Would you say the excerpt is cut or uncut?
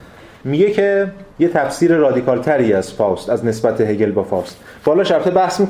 cut